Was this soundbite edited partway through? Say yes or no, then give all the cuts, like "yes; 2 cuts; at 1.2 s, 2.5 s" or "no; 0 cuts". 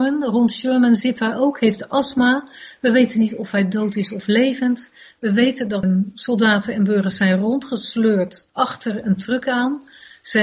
yes; 2 cuts; at 5.8 s, 8.5 s